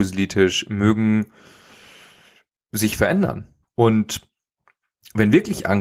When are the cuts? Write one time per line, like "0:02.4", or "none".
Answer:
0:03.6